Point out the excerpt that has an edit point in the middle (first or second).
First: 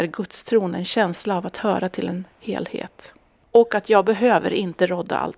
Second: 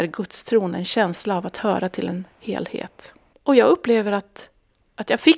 second